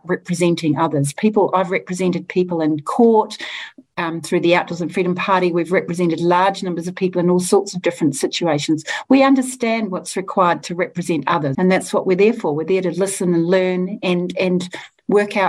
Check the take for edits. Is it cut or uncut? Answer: cut